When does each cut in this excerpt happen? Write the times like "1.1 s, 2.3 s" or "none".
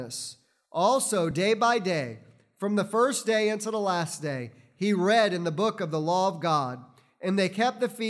none